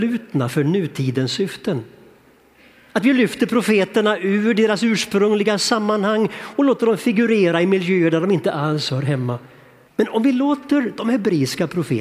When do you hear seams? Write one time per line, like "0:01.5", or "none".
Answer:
0:09.9